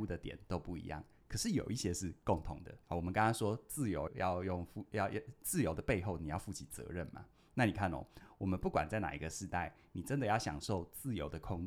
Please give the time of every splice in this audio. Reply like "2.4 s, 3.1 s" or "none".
2.8 s, 4.1 s